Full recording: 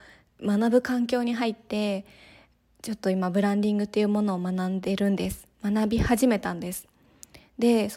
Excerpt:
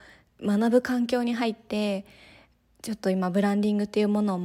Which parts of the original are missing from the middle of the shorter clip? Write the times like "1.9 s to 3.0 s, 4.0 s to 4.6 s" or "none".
none